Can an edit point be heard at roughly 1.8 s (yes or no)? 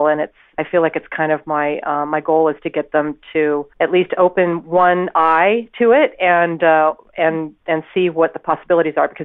no